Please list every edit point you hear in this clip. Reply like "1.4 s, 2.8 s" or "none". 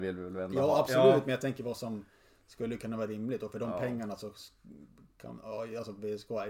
none